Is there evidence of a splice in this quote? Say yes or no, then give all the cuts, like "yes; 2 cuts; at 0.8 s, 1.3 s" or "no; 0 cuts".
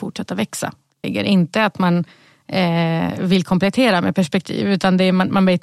yes; 1 cut; at 1.0 s